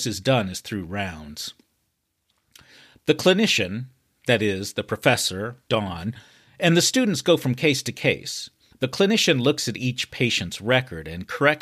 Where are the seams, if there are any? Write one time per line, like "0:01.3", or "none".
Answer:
0:05.7